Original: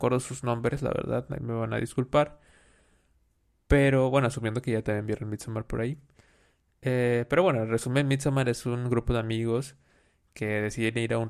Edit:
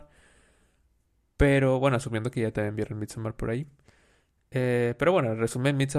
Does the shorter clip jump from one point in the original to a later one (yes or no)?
no